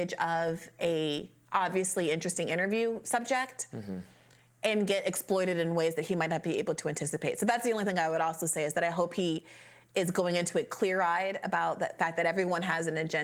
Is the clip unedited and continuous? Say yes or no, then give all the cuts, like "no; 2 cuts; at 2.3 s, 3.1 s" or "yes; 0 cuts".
yes; 0 cuts